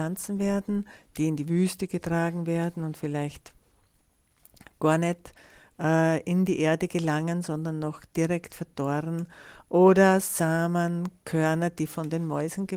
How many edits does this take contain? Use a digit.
0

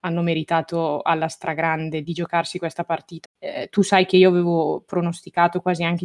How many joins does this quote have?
2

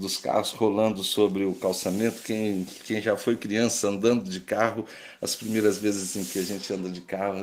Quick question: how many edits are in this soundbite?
1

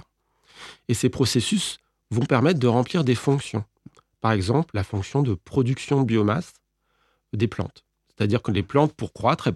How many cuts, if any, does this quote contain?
1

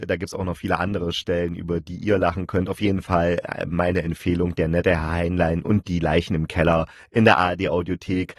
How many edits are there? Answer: 0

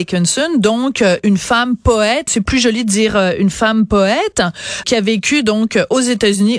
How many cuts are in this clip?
2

